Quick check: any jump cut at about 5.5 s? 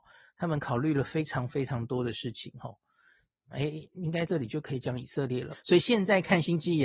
yes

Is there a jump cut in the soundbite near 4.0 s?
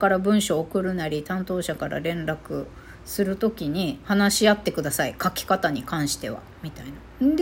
yes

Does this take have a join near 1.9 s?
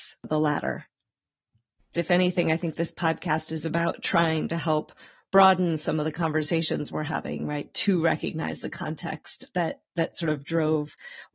yes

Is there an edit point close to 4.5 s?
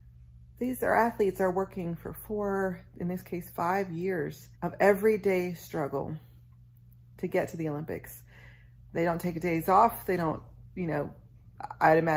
yes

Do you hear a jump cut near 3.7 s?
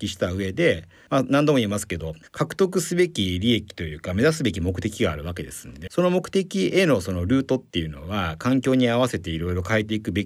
no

